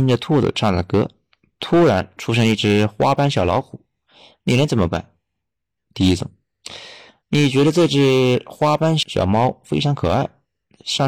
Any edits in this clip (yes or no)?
yes